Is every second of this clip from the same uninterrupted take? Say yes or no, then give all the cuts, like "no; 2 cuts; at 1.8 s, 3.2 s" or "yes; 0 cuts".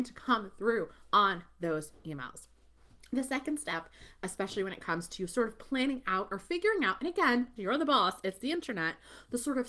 no; 1 cut; at 7.6 s